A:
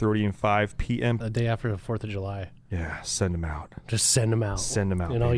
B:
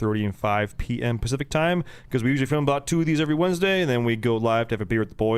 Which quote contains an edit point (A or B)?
A